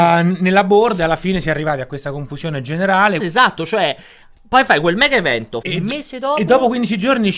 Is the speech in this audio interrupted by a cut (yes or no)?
yes